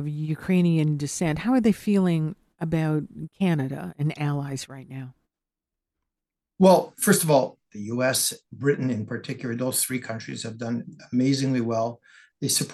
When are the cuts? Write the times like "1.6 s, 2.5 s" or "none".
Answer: 7.6 s